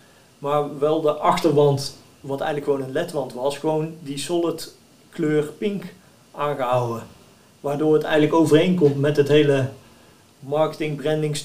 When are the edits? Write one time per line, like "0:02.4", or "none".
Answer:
none